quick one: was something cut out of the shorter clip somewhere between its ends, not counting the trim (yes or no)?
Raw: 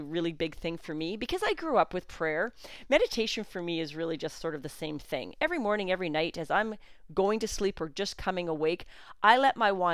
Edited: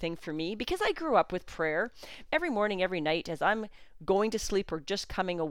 yes